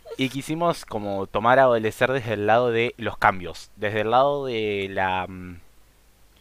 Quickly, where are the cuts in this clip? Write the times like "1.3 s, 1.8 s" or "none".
none